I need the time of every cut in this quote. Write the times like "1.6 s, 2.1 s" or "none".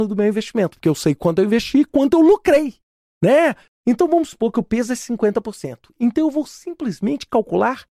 3.7 s

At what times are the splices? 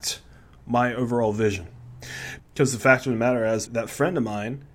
2.4 s, 3.7 s

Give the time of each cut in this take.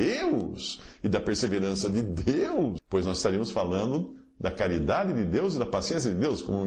2.8 s

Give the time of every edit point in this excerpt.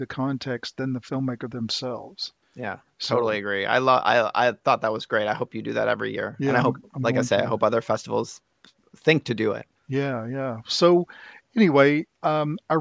none

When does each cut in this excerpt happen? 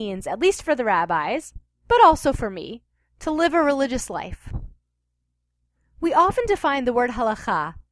none

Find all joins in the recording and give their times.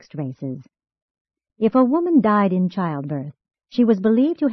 3.5 s

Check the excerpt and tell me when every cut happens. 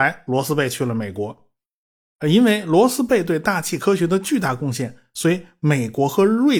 none

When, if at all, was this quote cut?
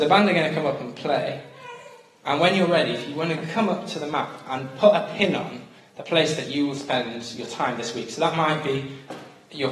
none

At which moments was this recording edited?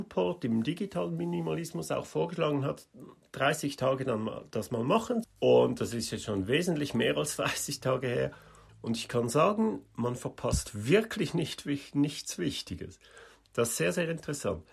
5.2 s, 8.7 s

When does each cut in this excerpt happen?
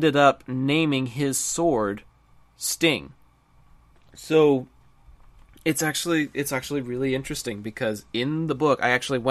4.0 s

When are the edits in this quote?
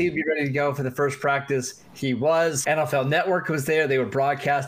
2.6 s

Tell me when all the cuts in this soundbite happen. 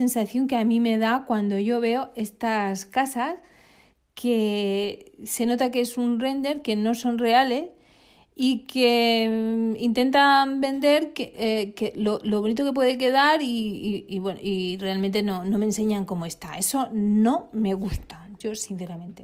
none

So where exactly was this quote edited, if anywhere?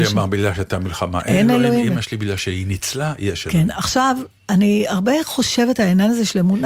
none

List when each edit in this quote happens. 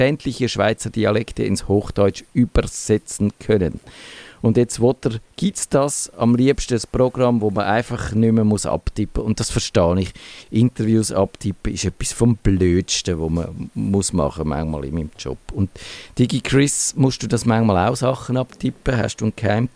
none

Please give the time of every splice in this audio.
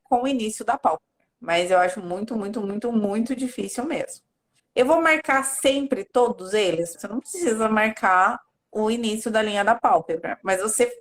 1.3 s, 4.6 s, 6.9 s

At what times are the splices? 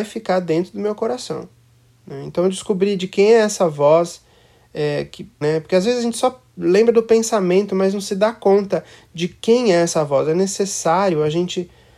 5.4 s

